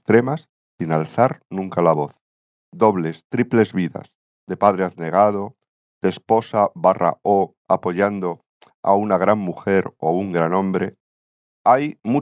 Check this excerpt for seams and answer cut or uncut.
uncut